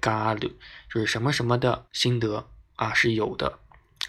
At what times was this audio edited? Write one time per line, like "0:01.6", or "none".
0:01.9